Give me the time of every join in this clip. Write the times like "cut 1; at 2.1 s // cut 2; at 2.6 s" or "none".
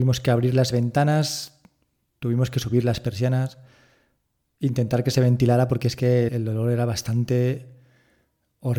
cut 1; at 6.3 s